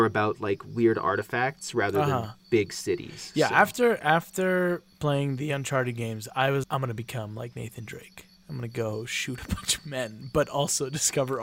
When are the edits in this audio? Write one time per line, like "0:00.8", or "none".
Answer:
0:06.6